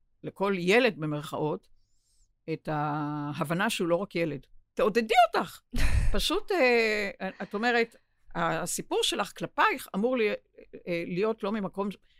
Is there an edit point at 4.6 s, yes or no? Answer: yes